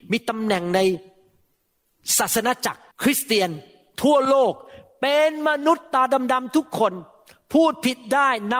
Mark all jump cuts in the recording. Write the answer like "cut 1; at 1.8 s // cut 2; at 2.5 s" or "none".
cut 1; at 2.9 s